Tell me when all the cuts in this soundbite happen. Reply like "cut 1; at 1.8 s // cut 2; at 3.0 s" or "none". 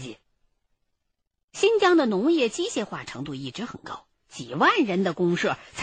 cut 1; at 4.1 s